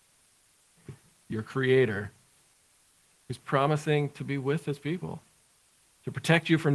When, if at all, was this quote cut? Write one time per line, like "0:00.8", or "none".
none